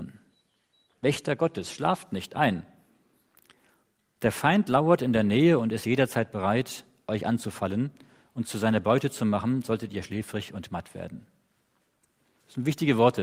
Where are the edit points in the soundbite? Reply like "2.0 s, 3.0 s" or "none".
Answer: 0.9 s

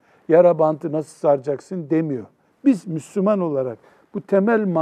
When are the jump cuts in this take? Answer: 2.5 s

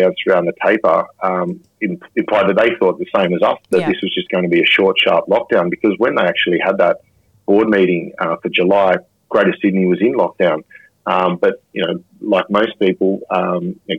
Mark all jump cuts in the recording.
none

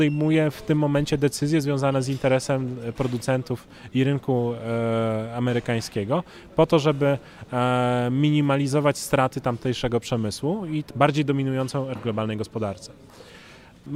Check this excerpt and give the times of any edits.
10.9 s, 12.0 s

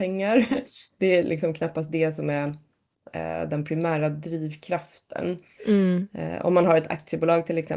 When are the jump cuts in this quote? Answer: 5.6 s

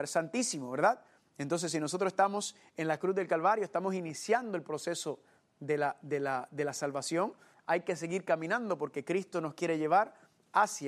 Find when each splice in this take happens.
none

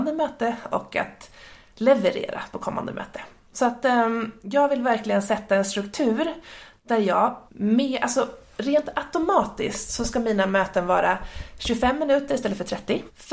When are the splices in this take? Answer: 7.5 s

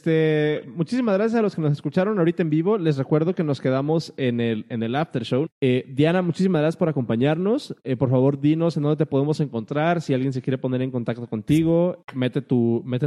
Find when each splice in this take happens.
5.5 s, 12.0 s

